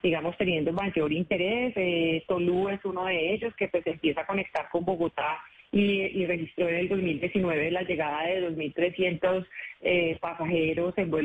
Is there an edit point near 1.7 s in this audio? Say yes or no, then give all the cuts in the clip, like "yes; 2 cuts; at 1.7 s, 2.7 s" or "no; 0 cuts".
no; 0 cuts